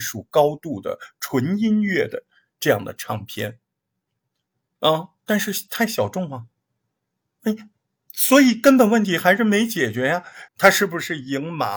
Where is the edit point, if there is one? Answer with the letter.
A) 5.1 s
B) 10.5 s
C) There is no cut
B